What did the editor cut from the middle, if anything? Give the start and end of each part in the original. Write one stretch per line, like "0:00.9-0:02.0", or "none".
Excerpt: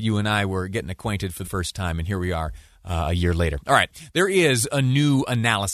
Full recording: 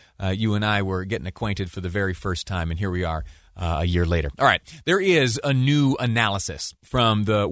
0:01.8-0:02.2